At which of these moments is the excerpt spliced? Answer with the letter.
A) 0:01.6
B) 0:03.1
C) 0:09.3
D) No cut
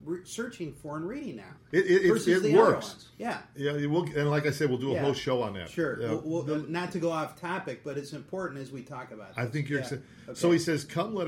A